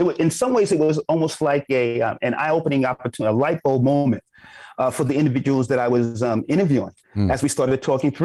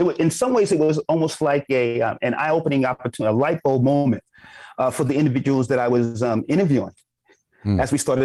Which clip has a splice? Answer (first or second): first